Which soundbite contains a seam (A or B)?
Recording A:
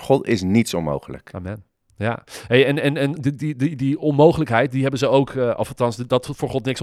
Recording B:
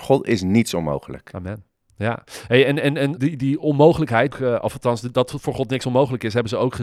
B